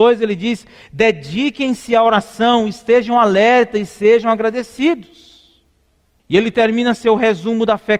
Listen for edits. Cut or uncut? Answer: cut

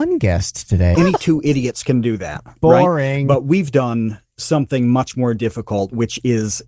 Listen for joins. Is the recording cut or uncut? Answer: cut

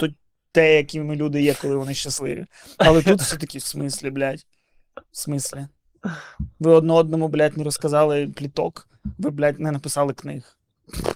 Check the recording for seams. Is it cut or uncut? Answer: cut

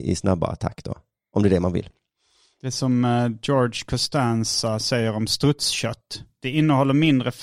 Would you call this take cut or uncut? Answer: uncut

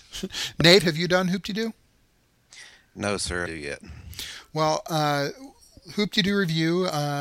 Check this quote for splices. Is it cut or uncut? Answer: cut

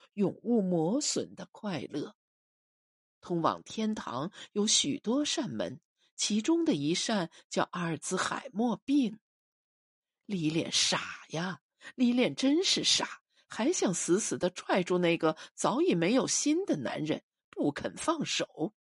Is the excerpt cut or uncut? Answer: uncut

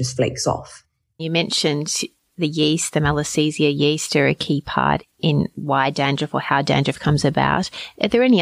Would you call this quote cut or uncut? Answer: cut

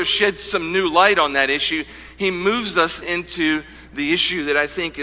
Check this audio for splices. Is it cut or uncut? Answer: cut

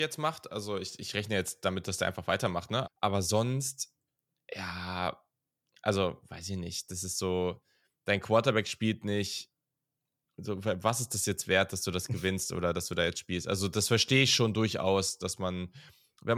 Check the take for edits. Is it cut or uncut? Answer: cut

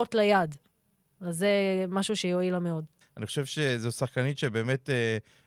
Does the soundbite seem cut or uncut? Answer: cut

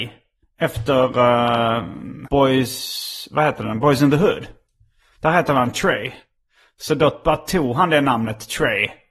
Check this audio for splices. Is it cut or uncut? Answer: cut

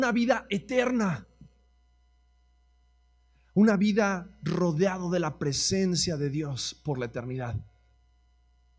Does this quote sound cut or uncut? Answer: uncut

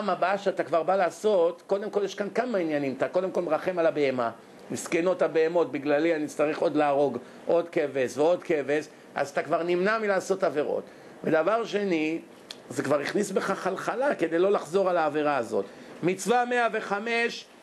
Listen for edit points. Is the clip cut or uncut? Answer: uncut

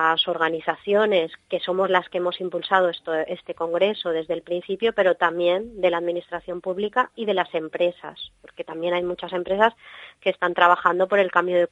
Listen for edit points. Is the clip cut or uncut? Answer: uncut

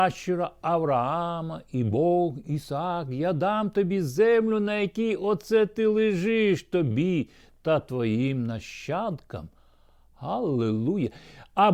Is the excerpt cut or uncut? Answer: uncut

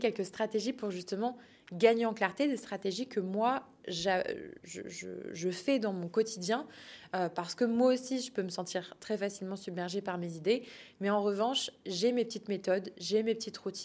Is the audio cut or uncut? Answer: uncut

